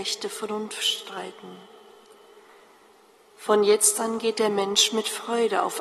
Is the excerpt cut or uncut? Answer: uncut